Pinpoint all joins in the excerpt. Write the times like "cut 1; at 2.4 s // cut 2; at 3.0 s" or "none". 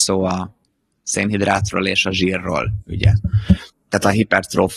none